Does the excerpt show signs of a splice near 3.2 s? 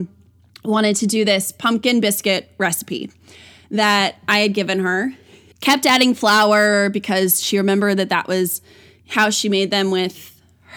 no; 1 cut; at 5.5 s

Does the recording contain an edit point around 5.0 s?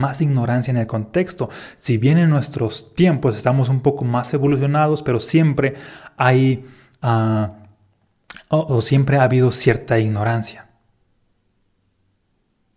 no; 0 cuts

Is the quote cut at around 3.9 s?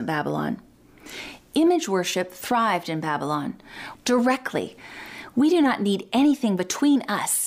yes; 1 cut; at 3.9 s

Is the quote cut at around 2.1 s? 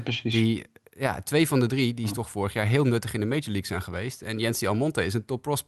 no; 0 cuts

